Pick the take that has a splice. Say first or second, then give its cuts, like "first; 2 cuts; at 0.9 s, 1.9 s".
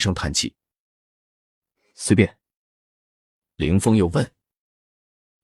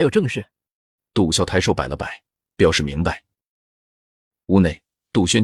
second; 1 cut; at 1.3 s